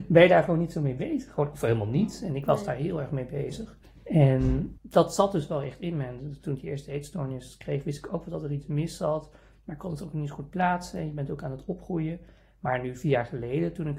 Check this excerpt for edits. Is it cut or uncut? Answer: uncut